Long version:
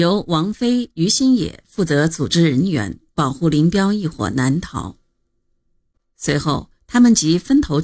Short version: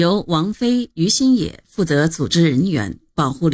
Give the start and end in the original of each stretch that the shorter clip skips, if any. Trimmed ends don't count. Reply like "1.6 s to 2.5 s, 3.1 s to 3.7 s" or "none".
none